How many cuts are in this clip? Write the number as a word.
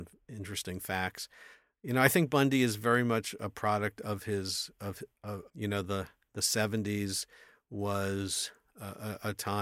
one